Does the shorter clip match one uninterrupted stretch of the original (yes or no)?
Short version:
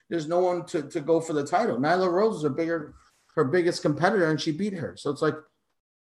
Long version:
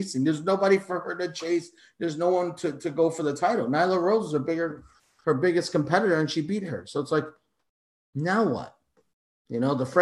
yes